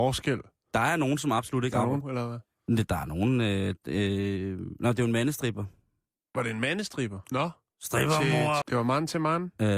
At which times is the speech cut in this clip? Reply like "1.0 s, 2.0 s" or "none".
2.0 s, 7.3 s, 8.6 s